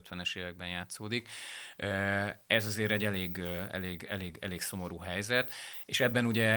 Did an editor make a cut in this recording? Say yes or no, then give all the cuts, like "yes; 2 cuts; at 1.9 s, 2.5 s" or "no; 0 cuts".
no; 0 cuts